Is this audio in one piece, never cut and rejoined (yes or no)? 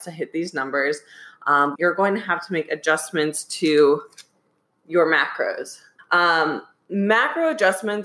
no